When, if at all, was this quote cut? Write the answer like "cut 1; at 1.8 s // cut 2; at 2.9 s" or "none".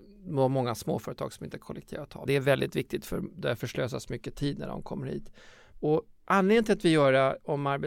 cut 1; at 2.3 s // cut 2; at 5.7 s